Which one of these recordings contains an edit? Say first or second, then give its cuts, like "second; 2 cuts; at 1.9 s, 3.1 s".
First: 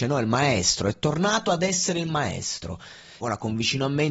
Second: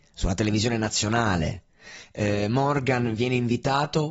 first; 1 cut; at 3.2 s